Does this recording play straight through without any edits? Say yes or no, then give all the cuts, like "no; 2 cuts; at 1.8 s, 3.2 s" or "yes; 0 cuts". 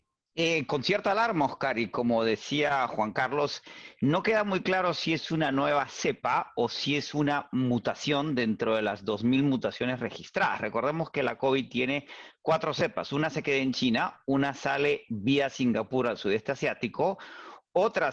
yes; 0 cuts